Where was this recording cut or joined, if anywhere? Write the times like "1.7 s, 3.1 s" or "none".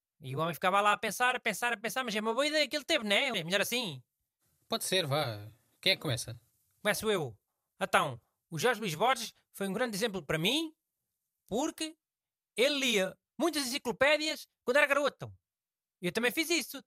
3.3 s